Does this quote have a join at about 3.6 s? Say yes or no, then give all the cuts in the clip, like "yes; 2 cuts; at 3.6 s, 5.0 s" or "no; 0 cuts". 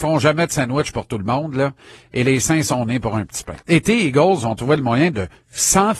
yes; 1 cut; at 3.6 s